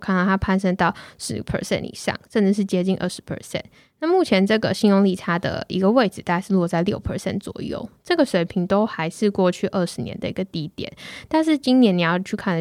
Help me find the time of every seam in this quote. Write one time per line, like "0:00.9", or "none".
none